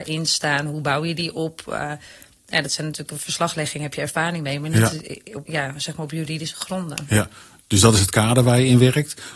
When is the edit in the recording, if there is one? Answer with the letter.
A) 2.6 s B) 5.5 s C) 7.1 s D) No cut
B